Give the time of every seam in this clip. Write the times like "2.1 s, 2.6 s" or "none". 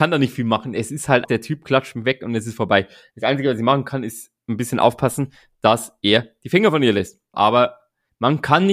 1.2 s, 7.3 s